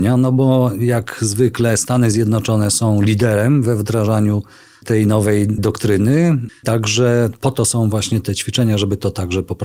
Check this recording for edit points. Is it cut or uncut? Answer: cut